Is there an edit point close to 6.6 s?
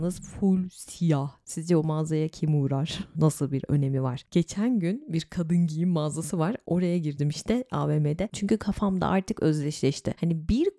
no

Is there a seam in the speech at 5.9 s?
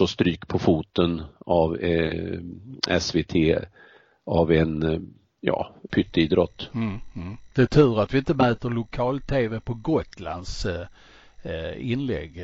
yes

